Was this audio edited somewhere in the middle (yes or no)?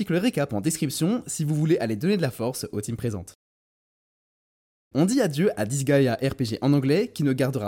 yes